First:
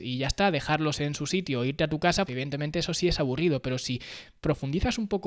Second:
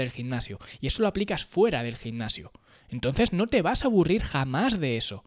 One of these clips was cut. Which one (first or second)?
first